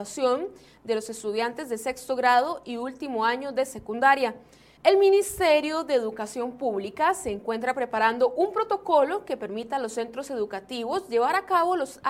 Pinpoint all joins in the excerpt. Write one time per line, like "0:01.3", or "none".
0:04.8